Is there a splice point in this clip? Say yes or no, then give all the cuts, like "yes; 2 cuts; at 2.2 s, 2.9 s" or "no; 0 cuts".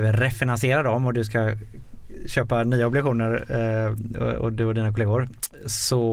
no; 0 cuts